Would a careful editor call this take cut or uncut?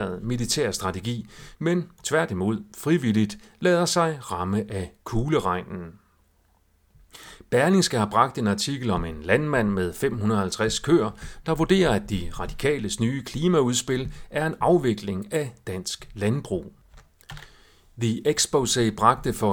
cut